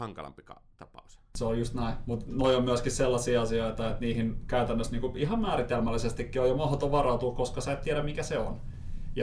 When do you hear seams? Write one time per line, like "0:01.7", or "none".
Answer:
none